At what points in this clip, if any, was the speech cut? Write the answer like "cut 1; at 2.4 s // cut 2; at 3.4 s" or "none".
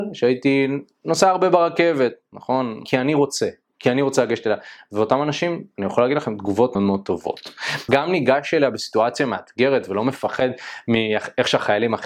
cut 1; at 2.9 s // cut 2; at 6.8 s // cut 3; at 7.9 s